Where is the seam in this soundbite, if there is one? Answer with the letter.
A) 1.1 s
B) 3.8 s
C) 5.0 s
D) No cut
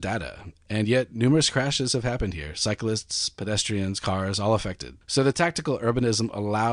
C